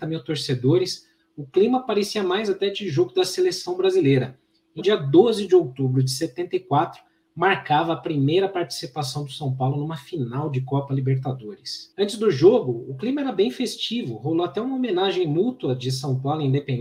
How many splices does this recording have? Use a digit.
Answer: 1